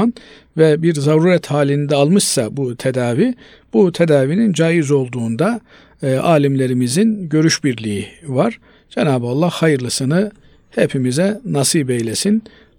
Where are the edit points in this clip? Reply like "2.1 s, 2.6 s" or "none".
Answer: none